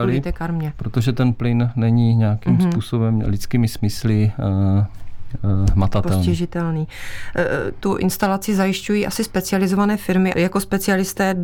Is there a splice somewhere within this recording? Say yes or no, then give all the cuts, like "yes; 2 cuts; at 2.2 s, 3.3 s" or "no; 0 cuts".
yes; 2 cuts; at 7.8 s, 10.3 s